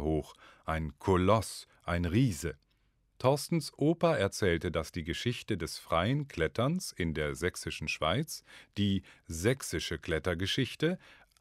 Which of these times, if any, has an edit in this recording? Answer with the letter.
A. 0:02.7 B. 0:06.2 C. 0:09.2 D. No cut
C